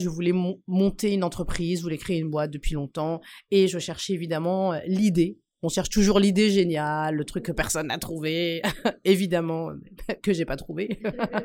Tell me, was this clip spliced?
no; 0 cuts

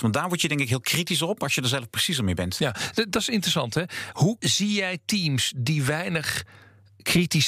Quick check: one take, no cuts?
yes; 0 cuts

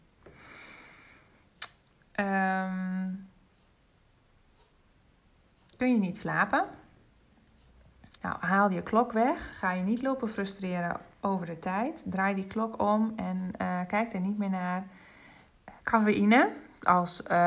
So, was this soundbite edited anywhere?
yes; 2 cuts; at 8.2 s, 15.8 s

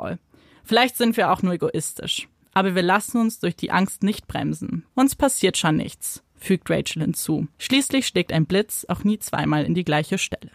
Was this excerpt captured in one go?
no; 2 cuts; at 4.9 s, 7.5 s

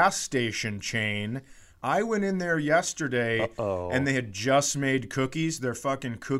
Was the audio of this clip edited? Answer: no; 0 cuts

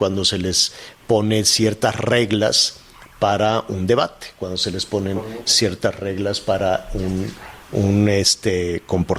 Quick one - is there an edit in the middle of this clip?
no; 0 cuts

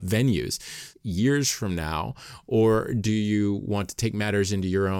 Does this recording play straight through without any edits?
no; 1 cut; at 0.9 s

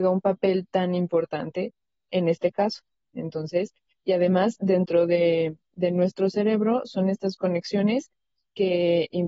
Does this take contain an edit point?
no; 0 cuts

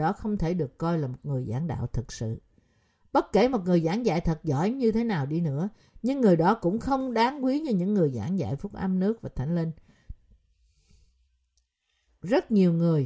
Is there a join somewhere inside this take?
yes; 1 cut; at 12.1 s

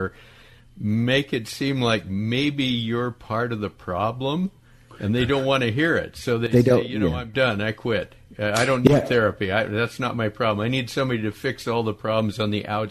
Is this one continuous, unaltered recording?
yes; 0 cuts

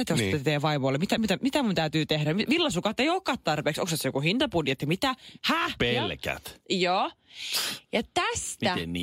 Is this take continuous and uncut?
no; 2 cuts; at 1.2 s, 5.8 s

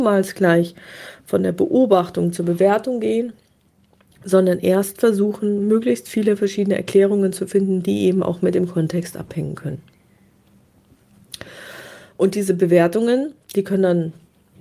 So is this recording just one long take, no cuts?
yes; 0 cuts

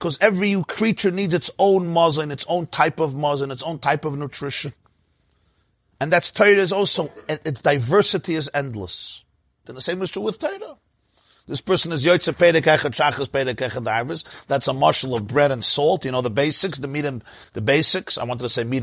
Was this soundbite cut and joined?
yes; 1 cut; at 9.6 s

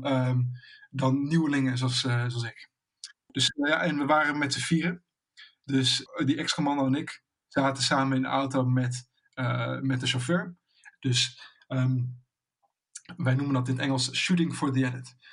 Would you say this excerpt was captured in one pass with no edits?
no; 1 cut; at 10.9 s

